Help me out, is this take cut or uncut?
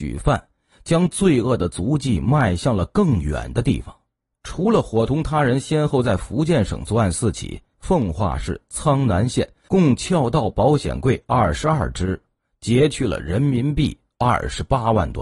cut